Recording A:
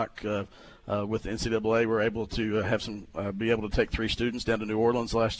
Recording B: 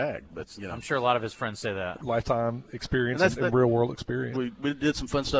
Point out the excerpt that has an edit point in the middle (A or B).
B